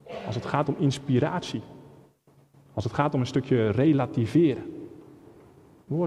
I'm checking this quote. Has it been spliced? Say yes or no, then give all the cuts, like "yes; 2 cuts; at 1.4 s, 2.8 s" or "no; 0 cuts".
no; 0 cuts